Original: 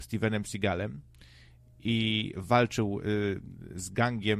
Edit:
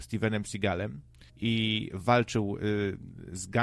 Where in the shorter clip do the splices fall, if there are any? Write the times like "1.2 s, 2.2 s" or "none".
1.3 s